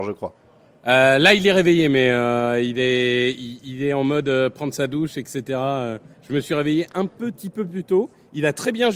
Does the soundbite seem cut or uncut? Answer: uncut